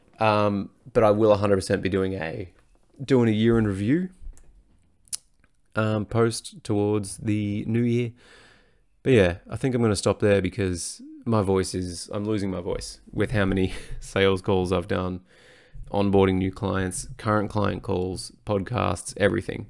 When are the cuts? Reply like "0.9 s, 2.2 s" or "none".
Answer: 15.8 s